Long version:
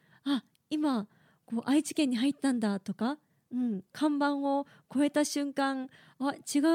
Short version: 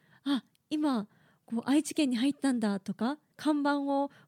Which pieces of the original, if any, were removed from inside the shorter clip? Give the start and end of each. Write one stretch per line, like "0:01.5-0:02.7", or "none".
0:03.3-0:03.9